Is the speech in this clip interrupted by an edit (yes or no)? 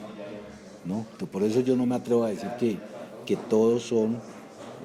yes